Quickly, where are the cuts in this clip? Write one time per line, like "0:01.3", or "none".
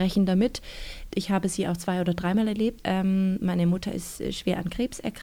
0:01.1
0:02.8